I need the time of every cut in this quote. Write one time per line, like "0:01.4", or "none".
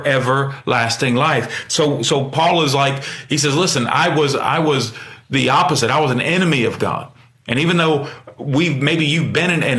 none